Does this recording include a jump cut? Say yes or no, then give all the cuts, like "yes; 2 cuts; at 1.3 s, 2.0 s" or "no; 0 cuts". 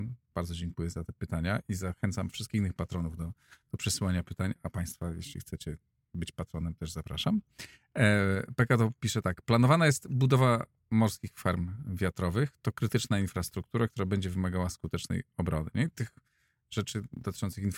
no; 0 cuts